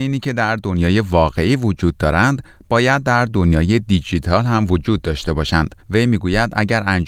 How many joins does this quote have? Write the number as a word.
one